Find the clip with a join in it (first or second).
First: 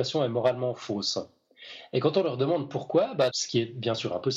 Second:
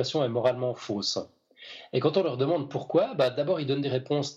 first